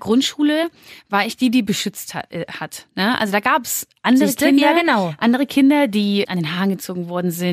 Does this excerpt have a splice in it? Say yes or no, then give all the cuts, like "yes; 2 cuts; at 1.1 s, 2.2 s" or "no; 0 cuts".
no; 0 cuts